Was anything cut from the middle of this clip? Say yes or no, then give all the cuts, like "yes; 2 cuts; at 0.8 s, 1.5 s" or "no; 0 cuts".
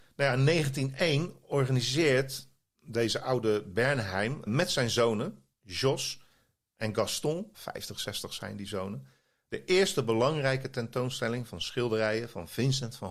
yes; 2 cuts; at 4.5 s, 7.5 s